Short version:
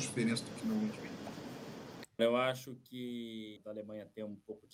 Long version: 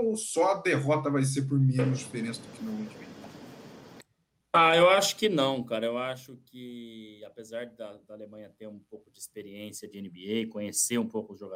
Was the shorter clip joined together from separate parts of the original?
yes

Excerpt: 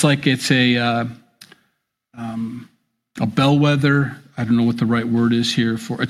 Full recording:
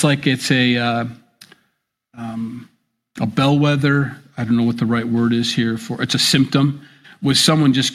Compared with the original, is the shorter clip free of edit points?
yes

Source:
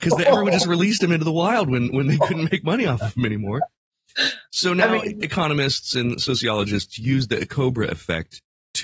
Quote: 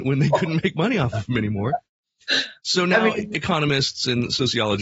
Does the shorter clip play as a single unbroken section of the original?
yes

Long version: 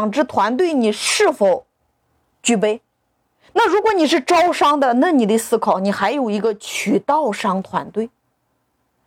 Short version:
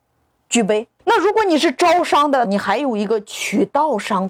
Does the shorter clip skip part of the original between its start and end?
yes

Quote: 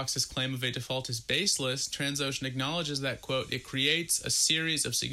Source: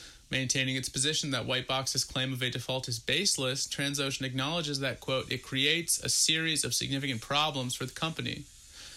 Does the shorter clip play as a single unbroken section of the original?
yes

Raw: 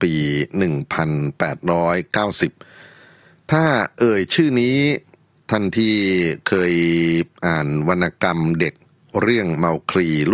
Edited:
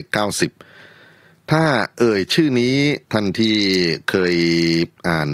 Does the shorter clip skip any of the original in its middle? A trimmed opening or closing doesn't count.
yes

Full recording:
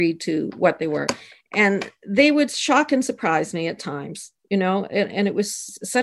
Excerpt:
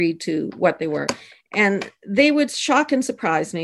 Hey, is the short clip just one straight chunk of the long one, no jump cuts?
yes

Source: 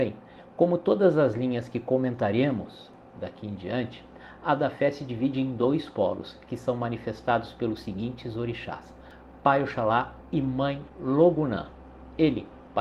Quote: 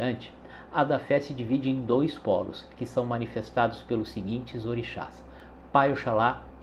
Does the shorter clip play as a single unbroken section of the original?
yes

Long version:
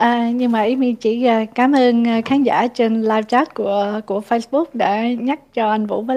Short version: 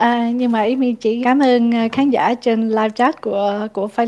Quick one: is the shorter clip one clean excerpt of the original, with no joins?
no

